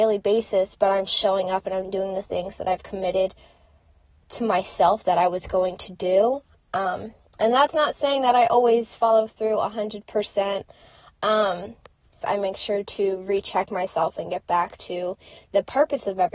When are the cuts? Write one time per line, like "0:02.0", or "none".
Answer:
0:01.1
0:12.2